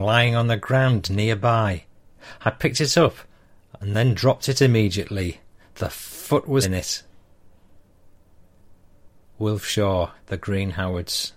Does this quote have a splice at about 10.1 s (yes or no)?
yes